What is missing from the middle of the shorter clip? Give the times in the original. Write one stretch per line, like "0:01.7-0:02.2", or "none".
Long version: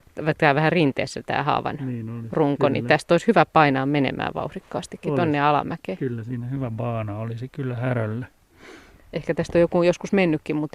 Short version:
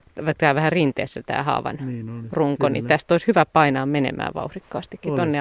none